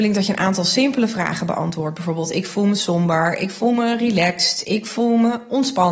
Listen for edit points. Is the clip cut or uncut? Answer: uncut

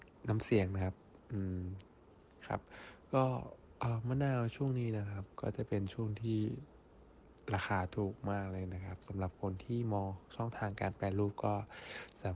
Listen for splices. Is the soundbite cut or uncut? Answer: uncut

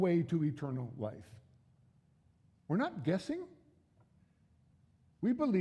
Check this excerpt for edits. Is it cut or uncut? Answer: uncut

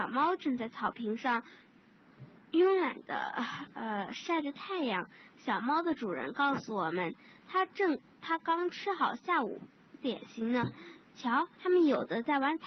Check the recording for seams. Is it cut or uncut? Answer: cut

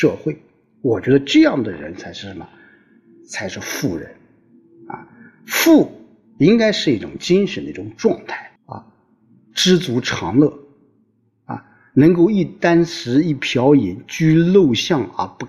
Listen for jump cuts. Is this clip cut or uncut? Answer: cut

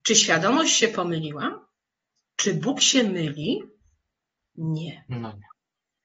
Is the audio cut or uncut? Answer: uncut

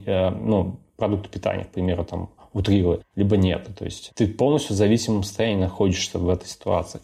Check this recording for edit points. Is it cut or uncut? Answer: uncut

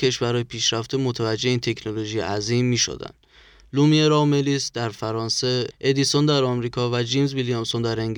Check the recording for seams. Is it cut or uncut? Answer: cut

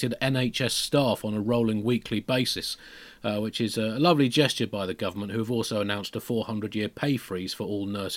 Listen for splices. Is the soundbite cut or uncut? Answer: uncut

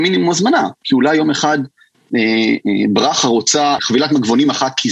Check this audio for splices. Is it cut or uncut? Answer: cut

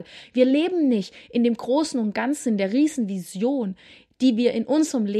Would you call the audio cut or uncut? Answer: uncut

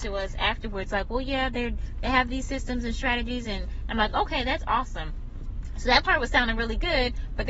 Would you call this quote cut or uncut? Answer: uncut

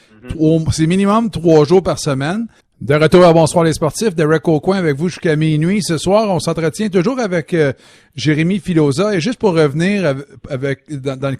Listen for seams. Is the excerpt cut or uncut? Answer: cut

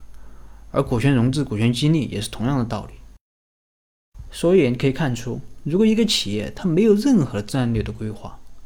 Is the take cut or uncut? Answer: uncut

